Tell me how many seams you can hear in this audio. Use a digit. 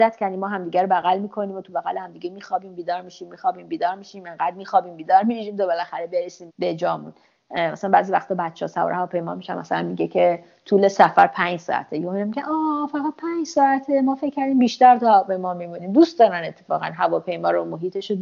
1